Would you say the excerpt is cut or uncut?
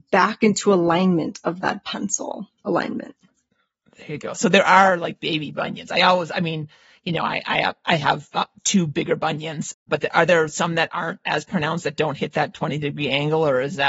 uncut